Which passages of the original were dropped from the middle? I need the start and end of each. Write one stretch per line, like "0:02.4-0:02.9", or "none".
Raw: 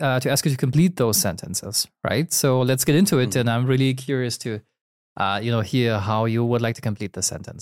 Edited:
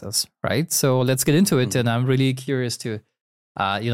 none